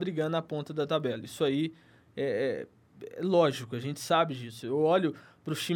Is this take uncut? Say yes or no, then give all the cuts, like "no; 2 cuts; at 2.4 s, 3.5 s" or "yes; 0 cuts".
yes; 0 cuts